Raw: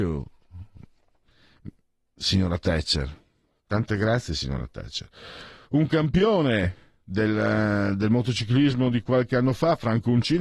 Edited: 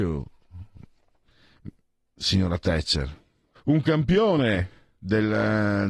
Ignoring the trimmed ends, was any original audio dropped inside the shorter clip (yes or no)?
yes